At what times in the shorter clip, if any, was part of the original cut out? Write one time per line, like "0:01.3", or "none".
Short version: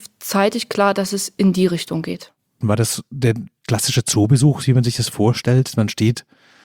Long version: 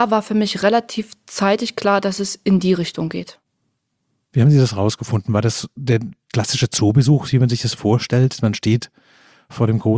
0:02.6